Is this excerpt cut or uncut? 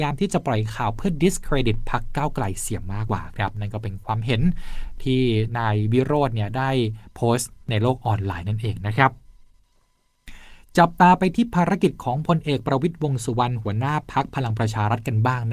cut